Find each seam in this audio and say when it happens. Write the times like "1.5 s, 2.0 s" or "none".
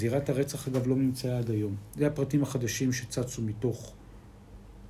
none